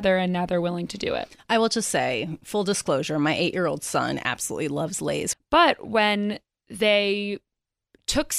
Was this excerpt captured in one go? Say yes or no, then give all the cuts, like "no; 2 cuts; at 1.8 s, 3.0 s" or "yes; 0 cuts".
no; 1 cut; at 5.3 s